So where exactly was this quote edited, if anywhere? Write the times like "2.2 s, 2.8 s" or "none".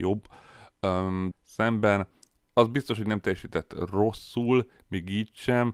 1.3 s